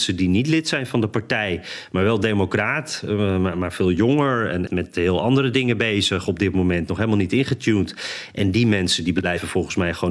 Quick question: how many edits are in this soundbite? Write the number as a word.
one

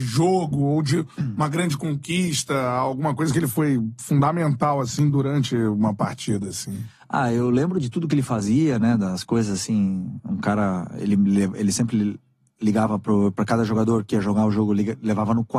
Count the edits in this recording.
zero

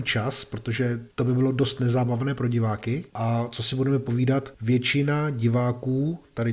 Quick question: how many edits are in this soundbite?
zero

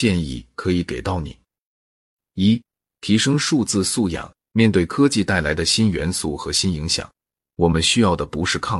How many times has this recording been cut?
one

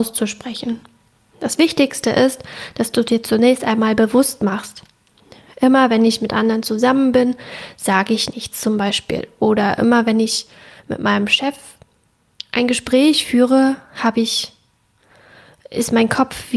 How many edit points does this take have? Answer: zero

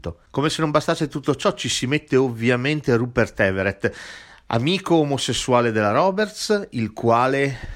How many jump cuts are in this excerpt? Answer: zero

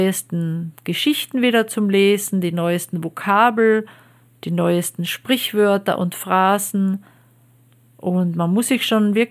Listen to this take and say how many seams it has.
zero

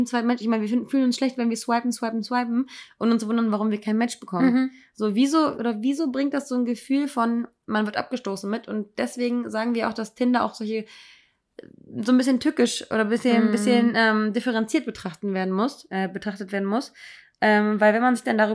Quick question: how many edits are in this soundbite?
one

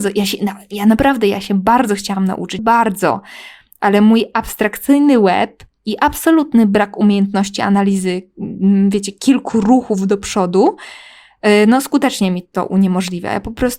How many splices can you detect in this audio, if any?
one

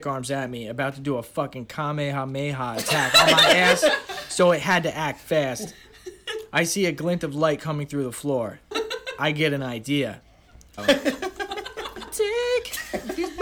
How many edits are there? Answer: three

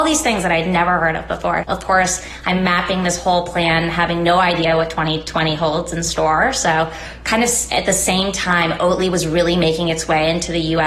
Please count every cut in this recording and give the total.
one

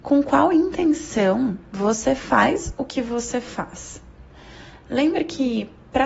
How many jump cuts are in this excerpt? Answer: zero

